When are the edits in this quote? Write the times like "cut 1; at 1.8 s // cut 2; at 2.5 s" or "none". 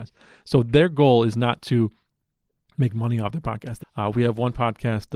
cut 1; at 3.8 s